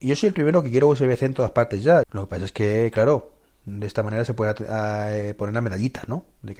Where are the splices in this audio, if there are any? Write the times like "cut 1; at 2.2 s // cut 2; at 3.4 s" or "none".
cut 1; at 2.0 s

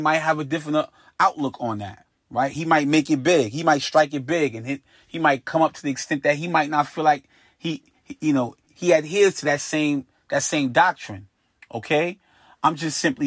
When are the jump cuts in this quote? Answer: cut 1; at 8.7 s

